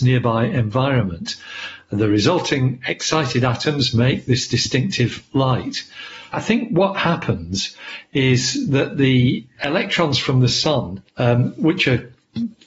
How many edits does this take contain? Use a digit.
2